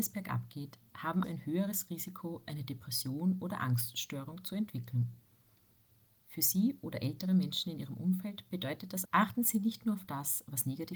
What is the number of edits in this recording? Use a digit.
2